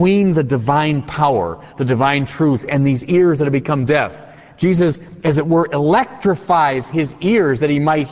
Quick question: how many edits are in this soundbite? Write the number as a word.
zero